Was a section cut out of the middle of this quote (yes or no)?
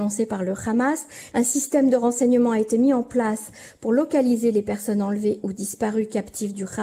yes